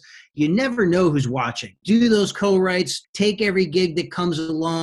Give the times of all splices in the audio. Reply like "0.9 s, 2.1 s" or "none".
1.8 s, 3.0 s